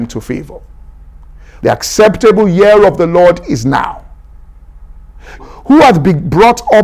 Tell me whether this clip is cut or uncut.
cut